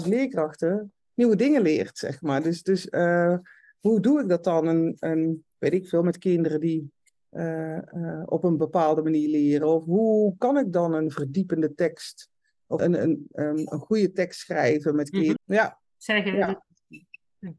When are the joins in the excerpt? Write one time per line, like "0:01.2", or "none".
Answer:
0:12.8
0:15.4